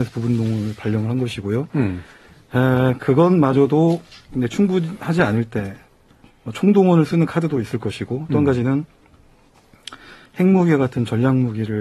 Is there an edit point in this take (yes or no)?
no